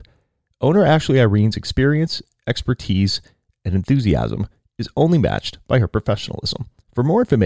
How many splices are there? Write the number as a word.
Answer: zero